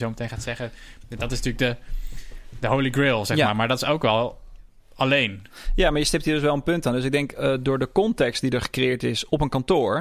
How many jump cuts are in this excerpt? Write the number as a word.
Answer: zero